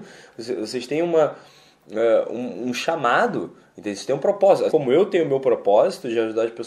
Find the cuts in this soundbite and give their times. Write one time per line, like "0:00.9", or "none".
0:04.7